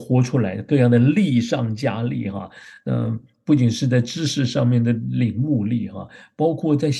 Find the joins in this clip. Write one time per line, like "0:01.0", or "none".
none